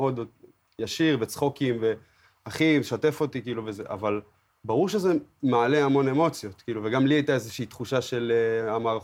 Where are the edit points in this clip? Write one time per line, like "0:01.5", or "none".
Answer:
none

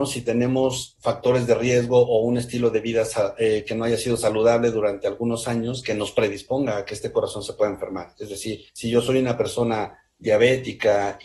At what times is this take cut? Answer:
0:08.7

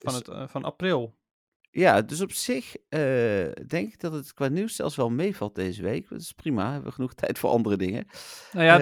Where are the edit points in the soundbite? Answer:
none

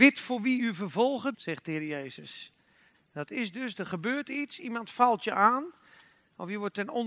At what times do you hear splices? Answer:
0:01.3
0:02.9

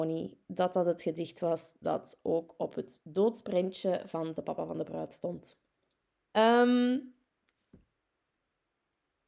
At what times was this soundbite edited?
0:06.3

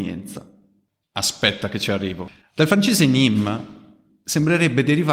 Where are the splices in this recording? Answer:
0:01.0
0:02.4

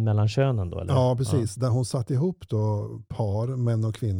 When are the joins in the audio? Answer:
none

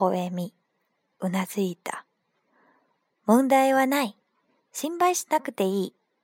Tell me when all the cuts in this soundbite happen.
none

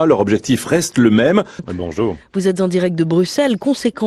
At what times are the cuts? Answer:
0:01.6

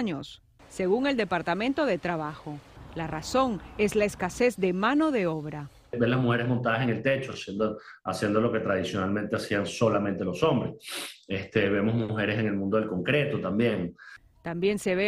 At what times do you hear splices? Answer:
none

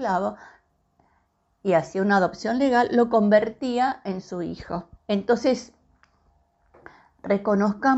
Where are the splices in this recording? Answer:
0:05.0

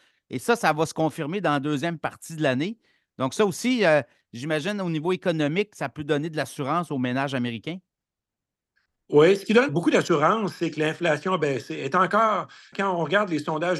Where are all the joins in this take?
0:09.7
0:12.7

